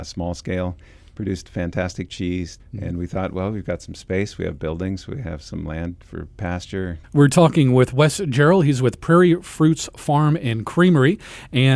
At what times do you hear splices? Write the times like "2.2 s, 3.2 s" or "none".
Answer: 2.6 s, 7.0 s